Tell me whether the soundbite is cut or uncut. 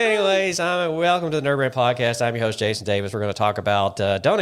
uncut